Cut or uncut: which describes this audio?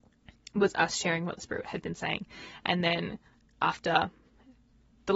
uncut